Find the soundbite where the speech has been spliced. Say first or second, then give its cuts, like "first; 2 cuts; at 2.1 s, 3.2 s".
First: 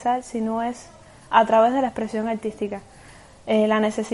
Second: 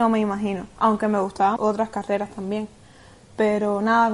second; 1 cut; at 1.6 s